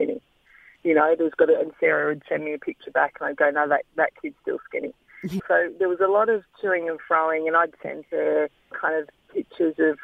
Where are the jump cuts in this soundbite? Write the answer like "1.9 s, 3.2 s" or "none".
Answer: 5.4 s, 8.7 s

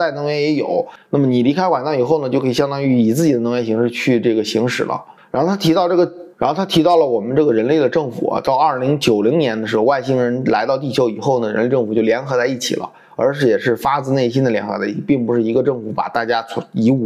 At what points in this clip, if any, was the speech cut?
6.3 s

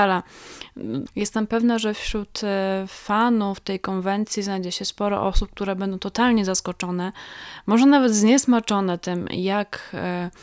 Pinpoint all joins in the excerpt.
1.1 s

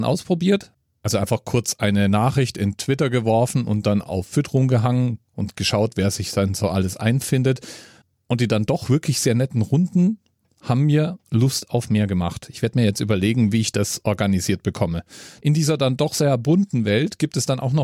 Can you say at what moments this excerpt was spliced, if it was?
15.4 s

